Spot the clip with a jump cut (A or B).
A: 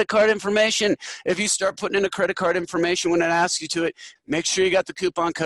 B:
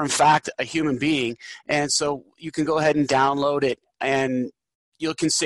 A